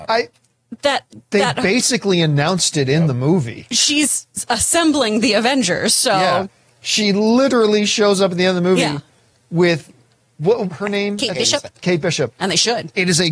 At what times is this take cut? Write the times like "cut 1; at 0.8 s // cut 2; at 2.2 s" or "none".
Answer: cut 1; at 10.7 s // cut 2; at 12.3 s